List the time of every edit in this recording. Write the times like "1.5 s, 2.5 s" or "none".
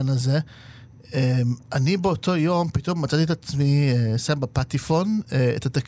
1.6 s